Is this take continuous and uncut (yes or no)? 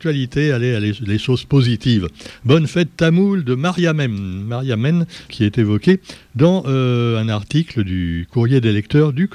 no